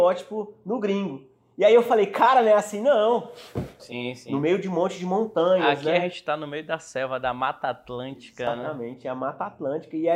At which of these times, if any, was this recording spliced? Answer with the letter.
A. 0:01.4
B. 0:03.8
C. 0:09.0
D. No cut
B